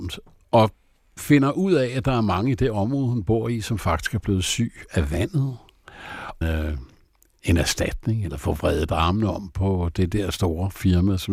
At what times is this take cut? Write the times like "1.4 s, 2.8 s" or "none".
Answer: 6.4 s